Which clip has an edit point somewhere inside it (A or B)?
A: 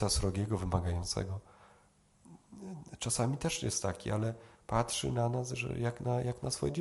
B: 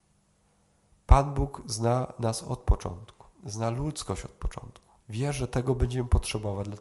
B